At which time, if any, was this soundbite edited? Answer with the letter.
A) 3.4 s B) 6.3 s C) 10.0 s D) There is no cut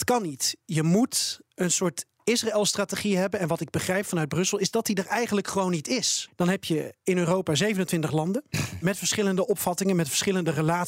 B